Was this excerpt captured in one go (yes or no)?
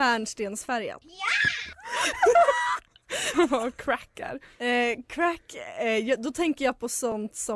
no